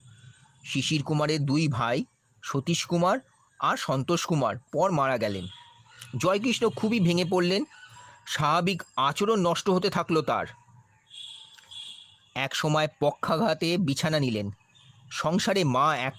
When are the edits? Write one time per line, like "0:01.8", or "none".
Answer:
0:04.7